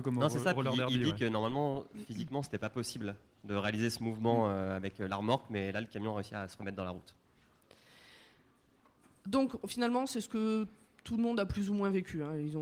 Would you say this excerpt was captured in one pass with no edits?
yes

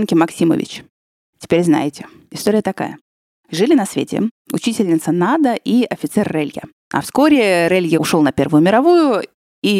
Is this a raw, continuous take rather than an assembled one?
no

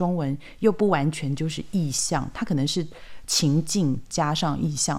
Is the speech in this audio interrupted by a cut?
no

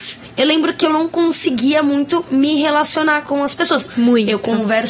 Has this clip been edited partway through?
yes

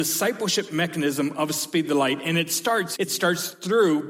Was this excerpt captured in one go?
no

